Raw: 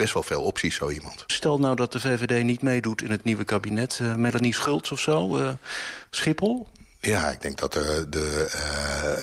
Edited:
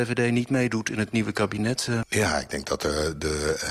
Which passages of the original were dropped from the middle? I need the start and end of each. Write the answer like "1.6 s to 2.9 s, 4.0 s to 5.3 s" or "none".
4.2 s to 6.9 s